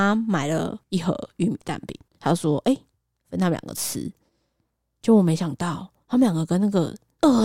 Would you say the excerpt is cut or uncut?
uncut